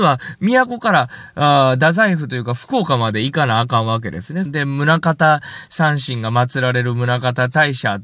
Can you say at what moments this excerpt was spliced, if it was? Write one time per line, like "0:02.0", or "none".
0:04.4